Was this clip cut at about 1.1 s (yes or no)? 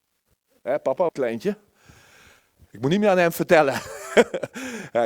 yes